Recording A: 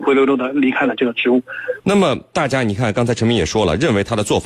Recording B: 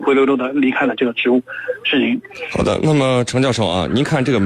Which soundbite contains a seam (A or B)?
A